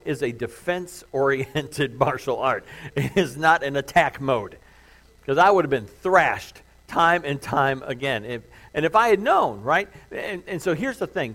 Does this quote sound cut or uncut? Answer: uncut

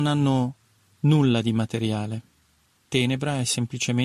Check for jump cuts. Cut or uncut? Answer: uncut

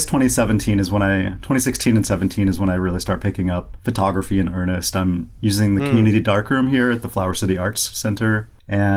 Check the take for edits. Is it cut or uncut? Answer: uncut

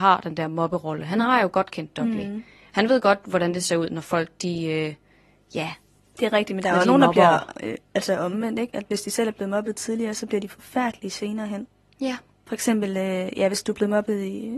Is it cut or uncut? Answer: uncut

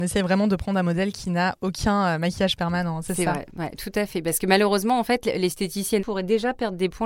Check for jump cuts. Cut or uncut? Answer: cut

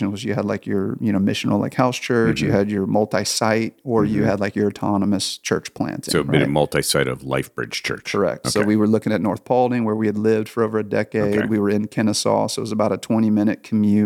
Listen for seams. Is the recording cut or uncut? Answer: uncut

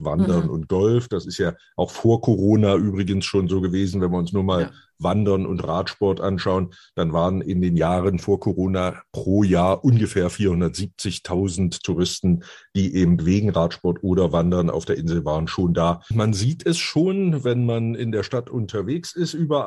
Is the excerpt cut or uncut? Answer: cut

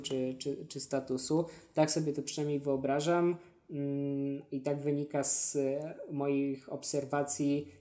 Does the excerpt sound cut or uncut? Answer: uncut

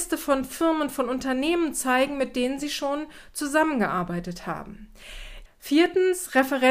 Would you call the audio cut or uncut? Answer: cut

